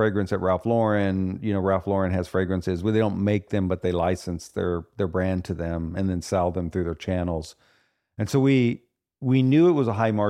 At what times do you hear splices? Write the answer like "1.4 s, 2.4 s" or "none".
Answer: none